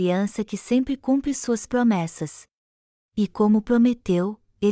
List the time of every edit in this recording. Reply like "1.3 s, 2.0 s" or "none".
3.0 s